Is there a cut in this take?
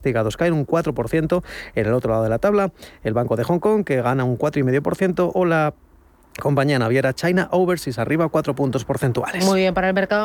no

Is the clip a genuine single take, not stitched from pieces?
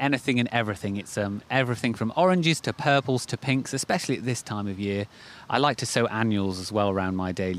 yes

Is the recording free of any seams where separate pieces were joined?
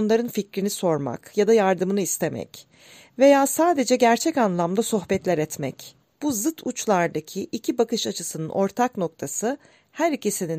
no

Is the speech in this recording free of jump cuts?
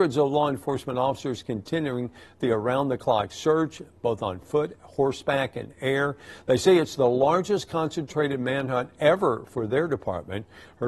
yes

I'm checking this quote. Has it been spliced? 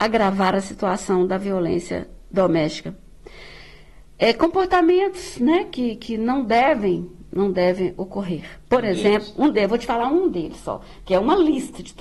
no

